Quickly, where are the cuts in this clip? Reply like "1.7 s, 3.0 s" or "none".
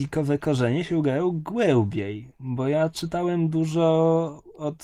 none